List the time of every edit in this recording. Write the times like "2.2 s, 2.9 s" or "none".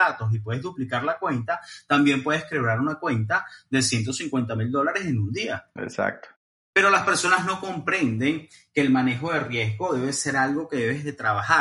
none

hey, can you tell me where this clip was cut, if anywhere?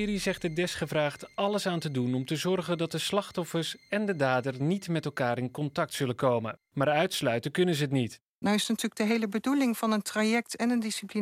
6.7 s, 8.4 s

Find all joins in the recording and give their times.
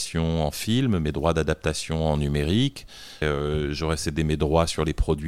3.2 s

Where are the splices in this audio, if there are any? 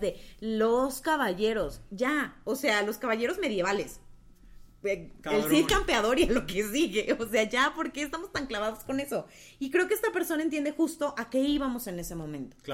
none

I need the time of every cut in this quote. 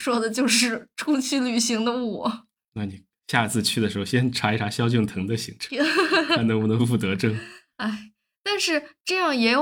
6.8 s

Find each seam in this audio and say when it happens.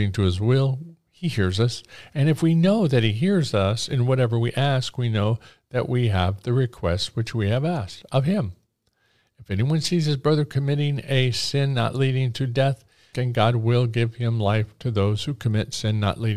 13.1 s

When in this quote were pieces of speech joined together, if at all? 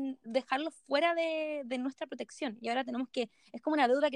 none

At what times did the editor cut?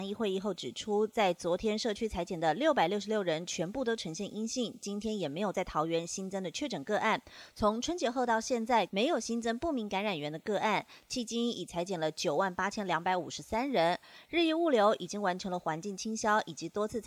8.9 s

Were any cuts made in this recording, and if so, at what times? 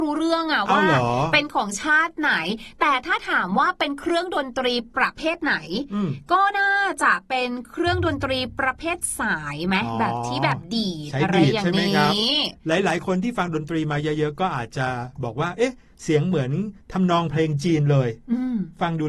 16.8 s

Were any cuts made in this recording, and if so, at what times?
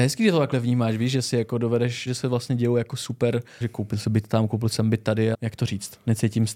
2.1 s, 3.6 s, 5.3 s

